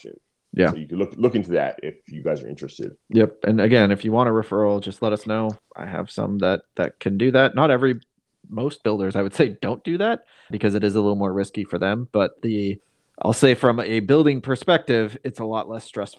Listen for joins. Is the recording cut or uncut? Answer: cut